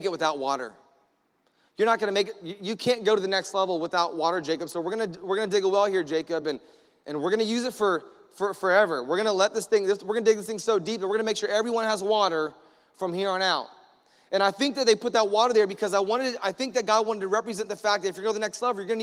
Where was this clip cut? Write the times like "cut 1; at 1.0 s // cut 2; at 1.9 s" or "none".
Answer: none